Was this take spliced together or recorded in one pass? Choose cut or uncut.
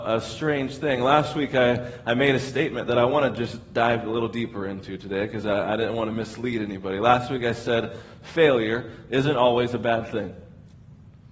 uncut